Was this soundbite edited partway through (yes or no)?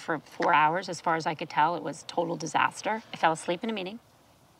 no